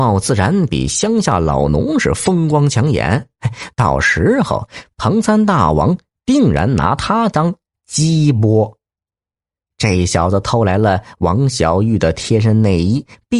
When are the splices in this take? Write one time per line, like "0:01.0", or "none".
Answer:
none